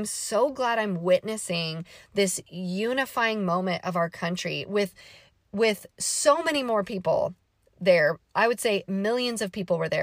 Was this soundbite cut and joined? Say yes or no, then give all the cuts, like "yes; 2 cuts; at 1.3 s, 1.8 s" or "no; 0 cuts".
no; 0 cuts